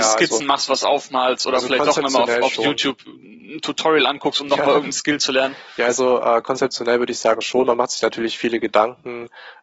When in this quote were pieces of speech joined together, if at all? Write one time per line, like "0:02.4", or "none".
none